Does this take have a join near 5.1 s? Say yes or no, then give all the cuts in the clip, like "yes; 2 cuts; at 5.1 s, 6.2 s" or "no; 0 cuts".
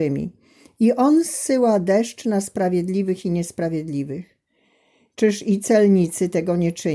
yes; 1 cut; at 5.1 s